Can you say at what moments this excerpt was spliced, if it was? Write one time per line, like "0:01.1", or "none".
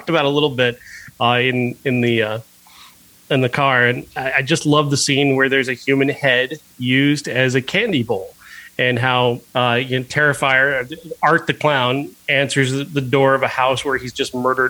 0:09.5